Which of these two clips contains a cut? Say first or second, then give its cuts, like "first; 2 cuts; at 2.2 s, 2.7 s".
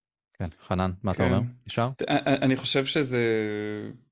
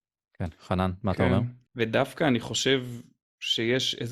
second; 1 cut; at 1.6 s